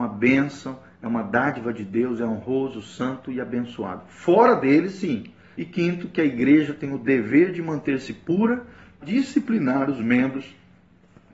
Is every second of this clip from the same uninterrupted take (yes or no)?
no